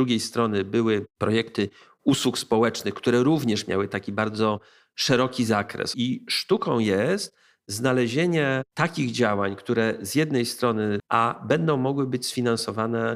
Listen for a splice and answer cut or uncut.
cut